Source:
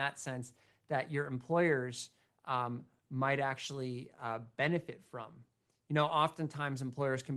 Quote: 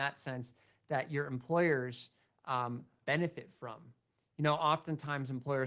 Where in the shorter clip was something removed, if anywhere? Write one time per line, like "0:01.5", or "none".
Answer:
0:03.0